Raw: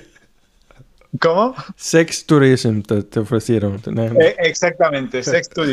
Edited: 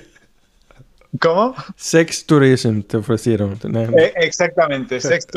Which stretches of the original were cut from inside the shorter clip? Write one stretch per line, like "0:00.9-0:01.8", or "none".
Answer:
0:02.8-0:03.1